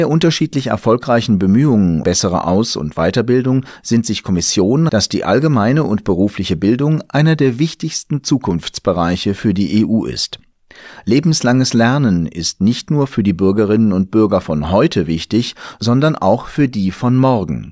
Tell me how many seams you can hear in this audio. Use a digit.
2